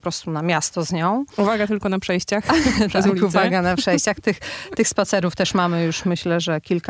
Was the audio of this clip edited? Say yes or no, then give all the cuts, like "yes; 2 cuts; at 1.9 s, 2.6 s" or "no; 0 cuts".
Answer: no; 0 cuts